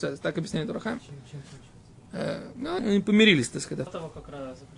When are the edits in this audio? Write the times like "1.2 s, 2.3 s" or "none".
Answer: 2.8 s, 3.9 s

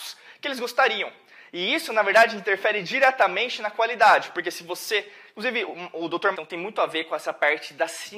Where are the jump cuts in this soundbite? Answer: 6.3 s

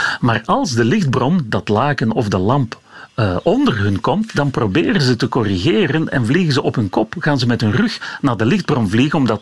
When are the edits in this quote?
none

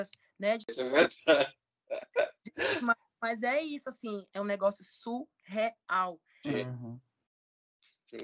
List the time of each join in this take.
4.3 s, 6.4 s

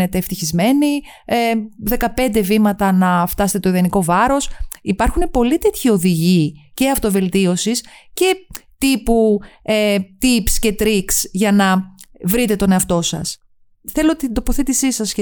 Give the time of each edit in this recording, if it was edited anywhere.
none

